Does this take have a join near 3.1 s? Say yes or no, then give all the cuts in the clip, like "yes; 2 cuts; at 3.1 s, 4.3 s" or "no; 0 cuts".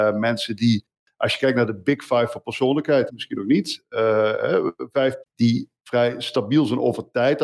yes; 2 cuts; at 3.1 s, 5.2 s